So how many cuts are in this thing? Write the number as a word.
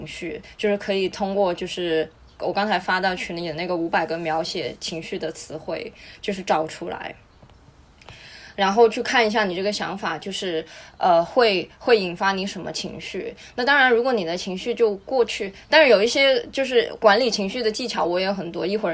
zero